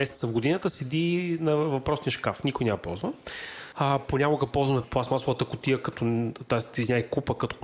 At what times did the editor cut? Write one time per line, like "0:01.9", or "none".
0:04.8